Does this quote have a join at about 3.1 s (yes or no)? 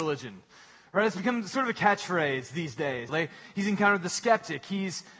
yes